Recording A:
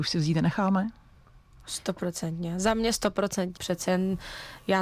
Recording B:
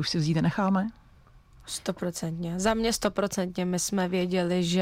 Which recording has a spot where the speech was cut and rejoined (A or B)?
A